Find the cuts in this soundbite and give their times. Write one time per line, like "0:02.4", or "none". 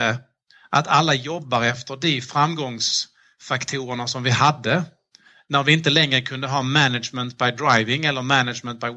none